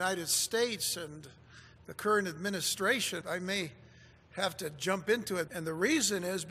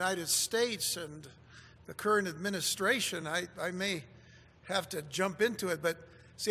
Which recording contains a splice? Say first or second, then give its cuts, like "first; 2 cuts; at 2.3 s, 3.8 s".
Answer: first; 2 cuts; at 3.2 s, 5.5 s